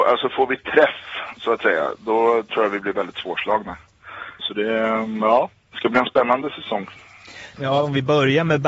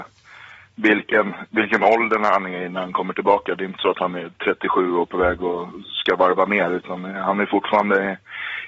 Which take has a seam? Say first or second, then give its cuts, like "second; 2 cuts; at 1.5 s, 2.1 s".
first; 1 cut; at 4.4 s